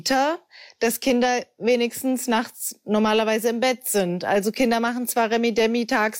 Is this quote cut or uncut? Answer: uncut